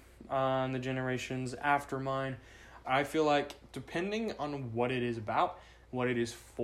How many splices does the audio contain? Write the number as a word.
one